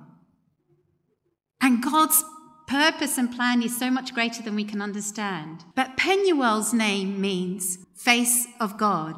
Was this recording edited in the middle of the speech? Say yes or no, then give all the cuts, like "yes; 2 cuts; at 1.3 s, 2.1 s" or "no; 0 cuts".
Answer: yes; 2 cuts; at 5.7 s, 7.8 s